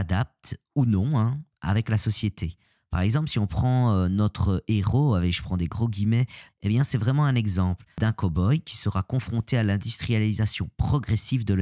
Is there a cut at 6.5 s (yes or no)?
yes